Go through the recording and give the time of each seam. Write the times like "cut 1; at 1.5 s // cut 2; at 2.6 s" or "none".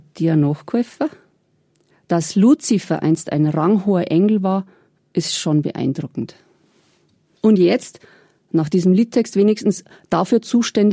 none